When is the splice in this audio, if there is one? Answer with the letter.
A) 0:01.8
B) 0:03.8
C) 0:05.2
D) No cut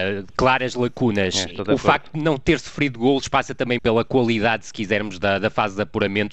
B